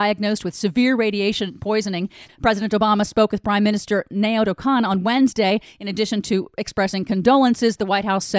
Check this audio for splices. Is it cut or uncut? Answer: cut